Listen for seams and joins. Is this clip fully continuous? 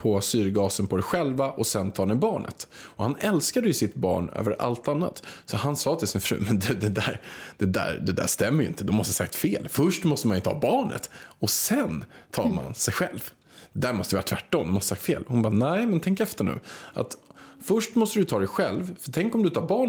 yes; 0 cuts

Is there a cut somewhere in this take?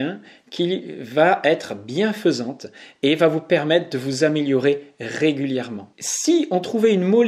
no; 0 cuts

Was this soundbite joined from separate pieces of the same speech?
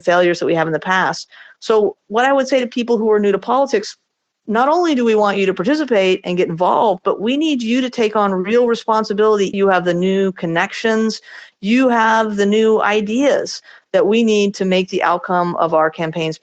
yes; 1 cut; at 9.5 s

